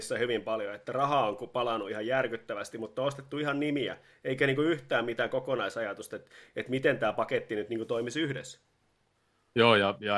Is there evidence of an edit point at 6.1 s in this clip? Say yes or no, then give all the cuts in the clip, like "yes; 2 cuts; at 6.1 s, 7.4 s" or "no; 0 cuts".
no; 0 cuts